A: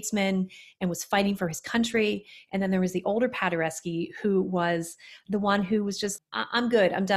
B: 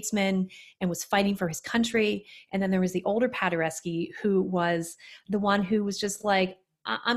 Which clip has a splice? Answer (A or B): A